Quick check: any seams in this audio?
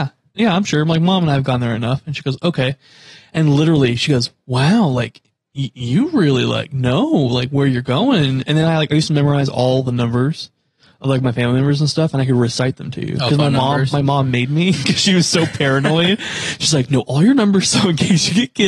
no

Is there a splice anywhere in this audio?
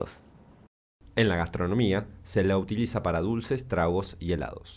yes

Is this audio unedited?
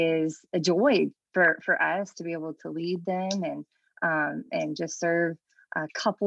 yes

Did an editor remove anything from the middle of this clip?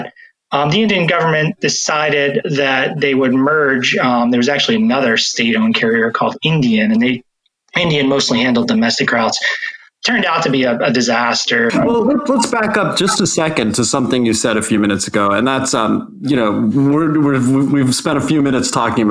yes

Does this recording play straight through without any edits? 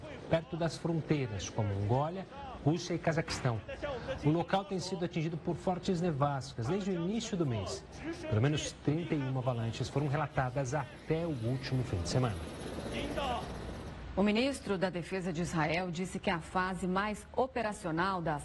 yes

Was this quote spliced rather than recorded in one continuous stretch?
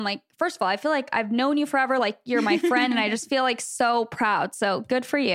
no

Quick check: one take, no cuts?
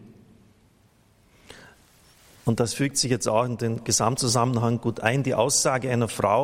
yes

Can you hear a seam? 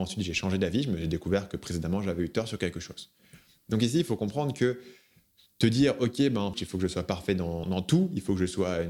yes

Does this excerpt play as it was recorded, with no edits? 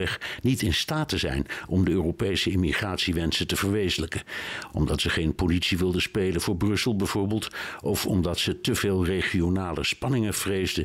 yes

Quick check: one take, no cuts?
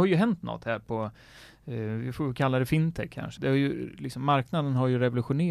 no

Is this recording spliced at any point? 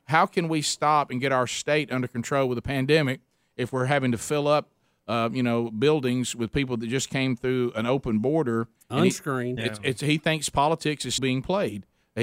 yes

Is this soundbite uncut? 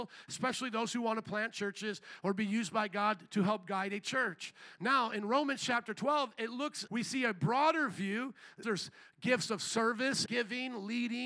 no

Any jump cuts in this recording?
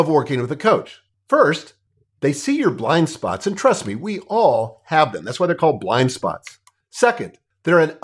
no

